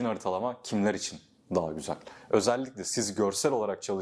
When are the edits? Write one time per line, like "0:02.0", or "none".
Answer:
none